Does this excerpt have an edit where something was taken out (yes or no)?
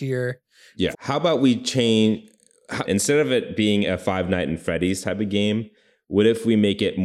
yes